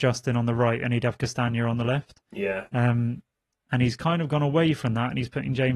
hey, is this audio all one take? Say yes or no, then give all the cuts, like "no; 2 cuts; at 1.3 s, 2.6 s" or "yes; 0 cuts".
yes; 0 cuts